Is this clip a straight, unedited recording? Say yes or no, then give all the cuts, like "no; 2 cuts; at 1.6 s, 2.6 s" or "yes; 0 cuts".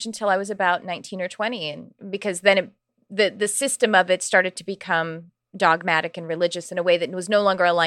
yes; 0 cuts